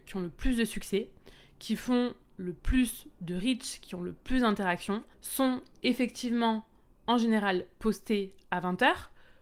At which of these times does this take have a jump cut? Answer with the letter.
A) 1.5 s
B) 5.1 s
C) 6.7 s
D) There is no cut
B